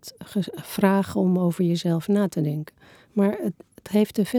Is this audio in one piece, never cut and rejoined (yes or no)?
no